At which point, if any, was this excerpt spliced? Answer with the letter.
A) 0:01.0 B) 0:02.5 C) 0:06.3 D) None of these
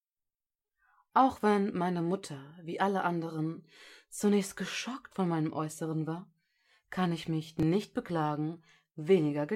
D